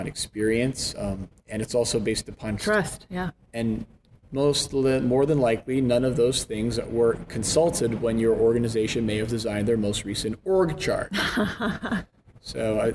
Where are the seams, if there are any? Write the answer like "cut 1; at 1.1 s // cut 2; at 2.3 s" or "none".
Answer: cut 1; at 2.6 s